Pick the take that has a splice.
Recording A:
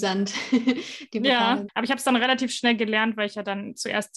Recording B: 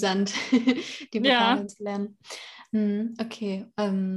A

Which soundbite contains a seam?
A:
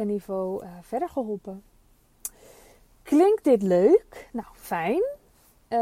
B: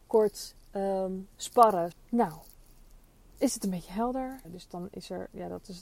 B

